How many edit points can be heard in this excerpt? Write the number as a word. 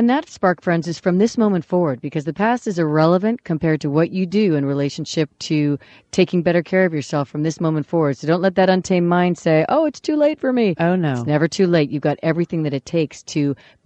zero